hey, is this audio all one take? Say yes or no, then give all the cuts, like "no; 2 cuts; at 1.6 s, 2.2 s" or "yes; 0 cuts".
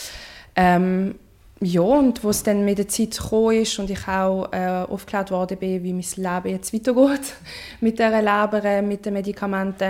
yes; 0 cuts